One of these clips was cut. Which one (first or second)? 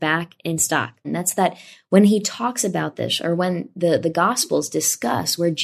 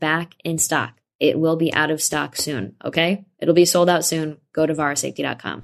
first